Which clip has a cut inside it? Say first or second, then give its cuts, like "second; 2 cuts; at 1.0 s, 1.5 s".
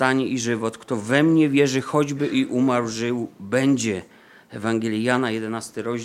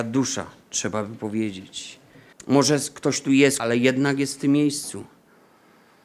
second; 2 cuts; at 2.3 s, 3.6 s